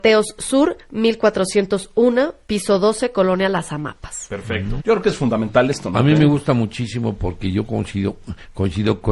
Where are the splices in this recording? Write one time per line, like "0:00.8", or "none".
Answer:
0:04.8